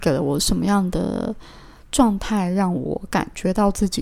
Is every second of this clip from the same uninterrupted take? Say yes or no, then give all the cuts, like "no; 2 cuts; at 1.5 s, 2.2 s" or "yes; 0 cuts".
yes; 0 cuts